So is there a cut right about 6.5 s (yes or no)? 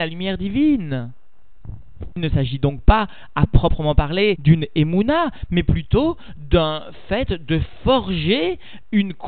no